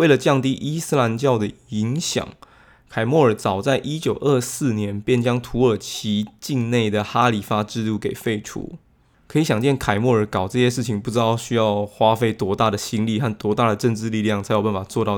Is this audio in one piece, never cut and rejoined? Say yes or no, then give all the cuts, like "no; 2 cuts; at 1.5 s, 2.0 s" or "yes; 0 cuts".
yes; 0 cuts